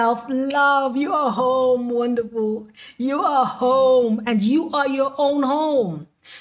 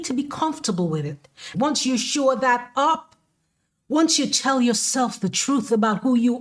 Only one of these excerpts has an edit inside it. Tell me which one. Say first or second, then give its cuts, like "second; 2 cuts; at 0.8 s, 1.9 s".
second; 1 cut; at 1.5 s